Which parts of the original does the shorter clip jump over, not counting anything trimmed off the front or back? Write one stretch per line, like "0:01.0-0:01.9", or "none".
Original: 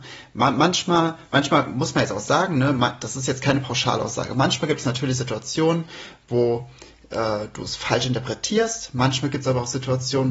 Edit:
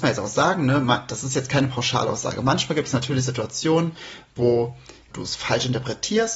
0:07.0-0:07.5